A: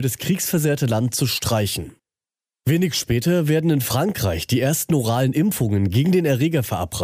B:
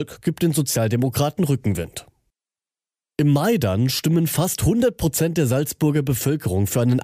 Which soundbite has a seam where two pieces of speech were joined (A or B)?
A